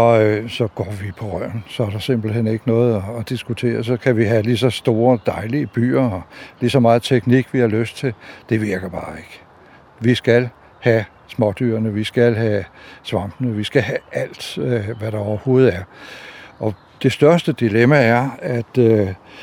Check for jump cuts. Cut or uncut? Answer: uncut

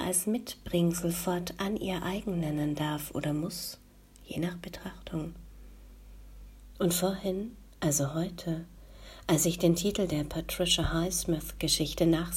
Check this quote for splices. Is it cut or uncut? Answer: cut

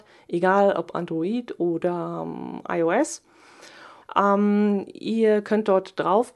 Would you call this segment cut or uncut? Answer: cut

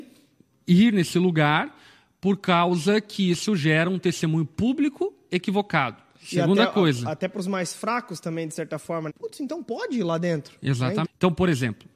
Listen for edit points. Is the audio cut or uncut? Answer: cut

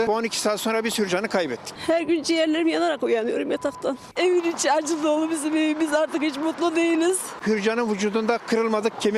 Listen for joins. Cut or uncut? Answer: cut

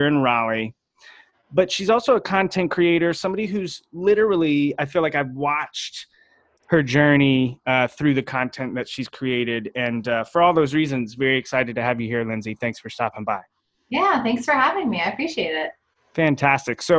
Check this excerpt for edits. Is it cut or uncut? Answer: uncut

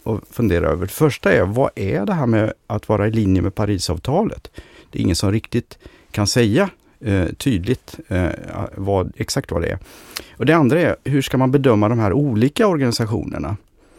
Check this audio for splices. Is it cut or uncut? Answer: uncut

